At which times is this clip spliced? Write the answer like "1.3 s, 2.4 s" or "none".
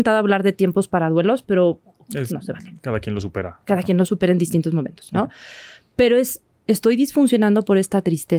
2.3 s